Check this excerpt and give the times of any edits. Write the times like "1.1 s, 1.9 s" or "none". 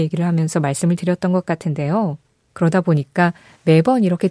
2.5 s

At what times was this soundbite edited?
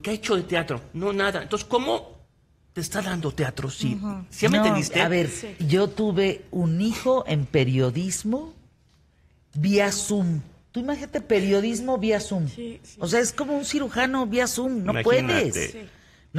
5.6 s

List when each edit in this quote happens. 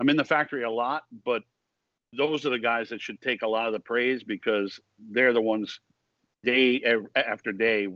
none

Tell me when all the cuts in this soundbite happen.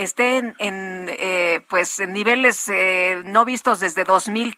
none

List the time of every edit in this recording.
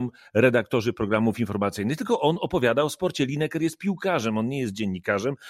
none

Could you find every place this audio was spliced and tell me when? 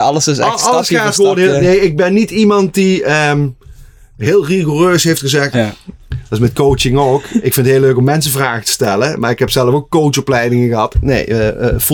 5.5 s, 10.9 s

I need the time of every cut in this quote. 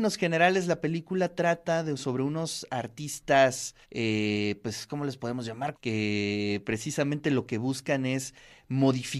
3.8 s, 5.7 s

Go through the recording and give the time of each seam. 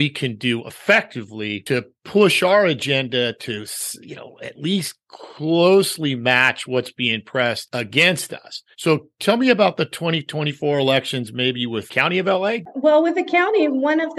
8.7 s

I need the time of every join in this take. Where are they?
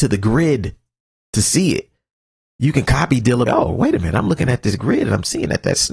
3.5 s

